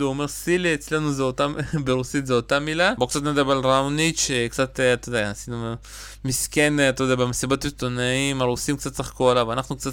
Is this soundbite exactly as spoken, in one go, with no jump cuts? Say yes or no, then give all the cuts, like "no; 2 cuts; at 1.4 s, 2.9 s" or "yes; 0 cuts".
no; 1 cut; at 3.0 s